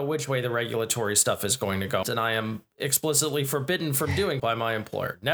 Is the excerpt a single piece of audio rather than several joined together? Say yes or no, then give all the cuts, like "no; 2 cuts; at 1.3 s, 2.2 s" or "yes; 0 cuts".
no; 2 cuts; at 2.0 s, 4.4 s